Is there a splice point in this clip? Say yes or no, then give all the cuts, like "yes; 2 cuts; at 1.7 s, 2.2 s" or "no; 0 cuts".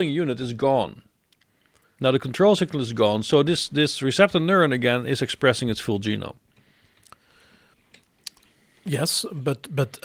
no; 0 cuts